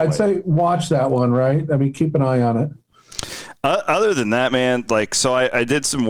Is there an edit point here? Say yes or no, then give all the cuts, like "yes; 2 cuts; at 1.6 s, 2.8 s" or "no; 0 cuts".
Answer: no; 0 cuts